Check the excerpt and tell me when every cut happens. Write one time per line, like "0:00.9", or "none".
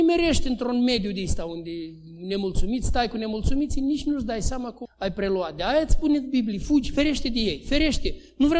0:04.9